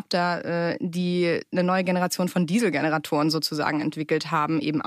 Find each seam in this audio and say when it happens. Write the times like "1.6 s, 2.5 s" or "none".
none